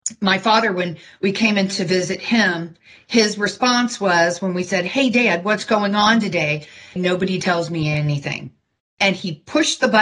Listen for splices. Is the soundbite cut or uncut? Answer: cut